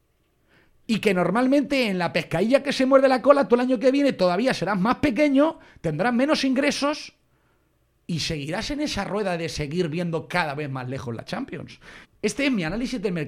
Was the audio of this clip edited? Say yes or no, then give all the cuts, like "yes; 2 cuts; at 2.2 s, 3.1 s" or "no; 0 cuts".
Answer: yes; 1 cut; at 12.0 s